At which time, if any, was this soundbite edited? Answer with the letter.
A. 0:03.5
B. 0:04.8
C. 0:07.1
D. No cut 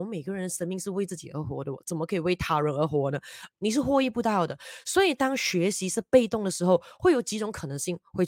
A